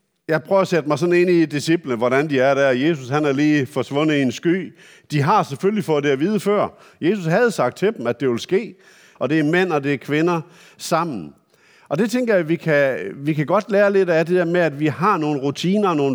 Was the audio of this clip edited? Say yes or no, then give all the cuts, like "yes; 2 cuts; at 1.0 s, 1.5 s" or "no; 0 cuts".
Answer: yes; 1 cut; at 9.2 s